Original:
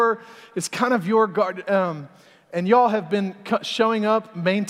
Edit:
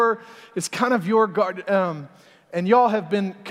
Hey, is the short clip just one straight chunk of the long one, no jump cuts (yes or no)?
yes